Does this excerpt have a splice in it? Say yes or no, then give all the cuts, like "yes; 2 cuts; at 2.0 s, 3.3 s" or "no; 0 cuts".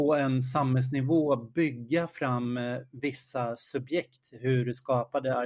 no; 0 cuts